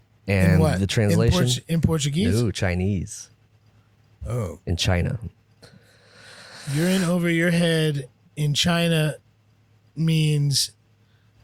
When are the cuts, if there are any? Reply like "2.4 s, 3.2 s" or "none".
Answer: none